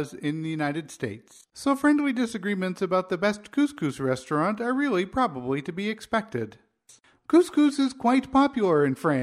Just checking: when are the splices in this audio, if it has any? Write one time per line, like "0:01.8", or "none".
0:07.2